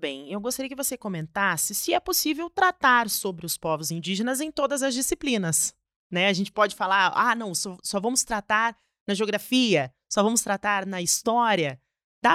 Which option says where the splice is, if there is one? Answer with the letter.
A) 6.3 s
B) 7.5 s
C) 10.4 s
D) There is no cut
D